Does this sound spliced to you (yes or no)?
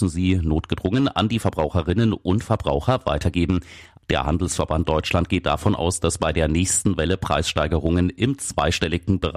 yes